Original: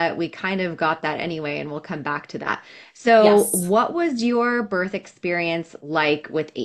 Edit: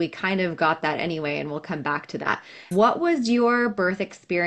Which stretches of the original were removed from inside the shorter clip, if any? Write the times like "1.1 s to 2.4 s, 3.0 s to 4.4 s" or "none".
2.9 s to 3.6 s

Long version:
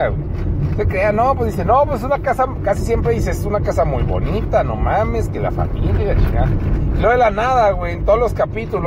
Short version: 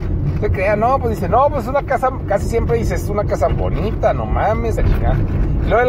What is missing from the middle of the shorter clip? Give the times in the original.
3.8 s to 4.0 s, 5.3 s to 6.1 s

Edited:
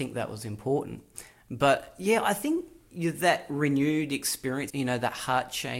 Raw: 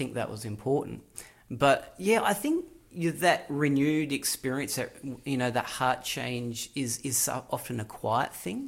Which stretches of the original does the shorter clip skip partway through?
4.7 s to 5.2 s

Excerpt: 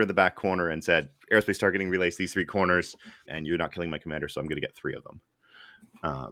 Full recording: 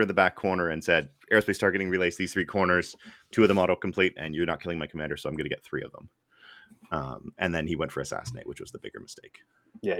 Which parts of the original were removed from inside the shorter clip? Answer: 3.3 s to 4.1 s

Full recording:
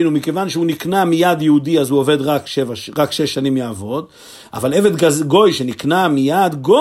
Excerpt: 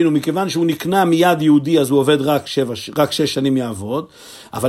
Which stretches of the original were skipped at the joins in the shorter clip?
none

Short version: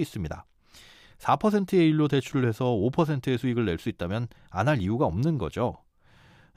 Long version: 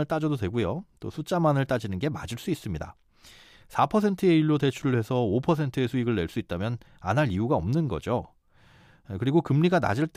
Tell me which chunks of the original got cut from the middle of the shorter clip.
none

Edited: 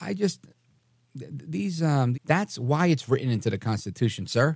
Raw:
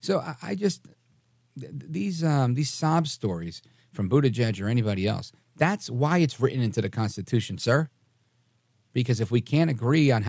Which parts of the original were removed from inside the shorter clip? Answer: 2.6 s to 5.5 s

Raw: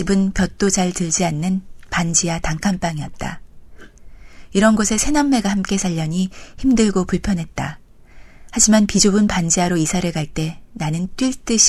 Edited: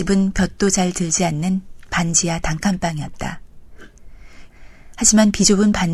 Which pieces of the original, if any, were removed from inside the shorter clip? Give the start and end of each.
4.5 s to 8.0 s

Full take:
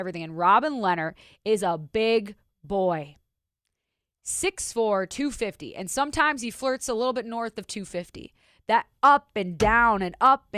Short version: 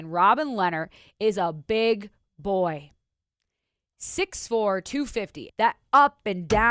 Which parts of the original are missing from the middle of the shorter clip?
5.7 s to 8.6 s

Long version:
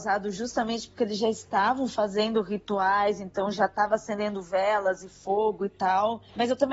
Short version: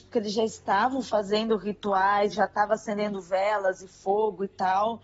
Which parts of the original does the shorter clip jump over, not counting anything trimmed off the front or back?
3.2 s to 3.5 s

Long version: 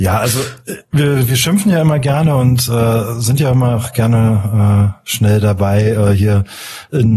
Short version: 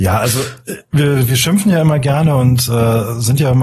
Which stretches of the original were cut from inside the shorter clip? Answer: none

